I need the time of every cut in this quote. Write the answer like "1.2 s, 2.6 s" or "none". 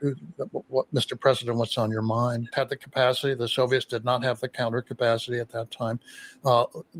2.5 s